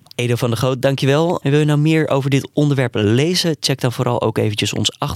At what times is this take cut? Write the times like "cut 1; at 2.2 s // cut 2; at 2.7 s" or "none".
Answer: cut 1; at 1.4 s